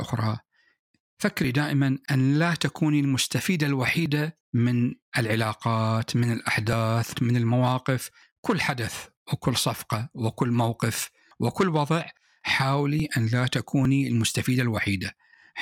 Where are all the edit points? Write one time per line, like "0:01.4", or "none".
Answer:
0:07.1